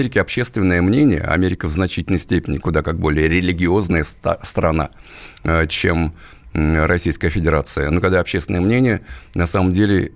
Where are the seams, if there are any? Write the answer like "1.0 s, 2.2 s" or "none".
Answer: 2.6 s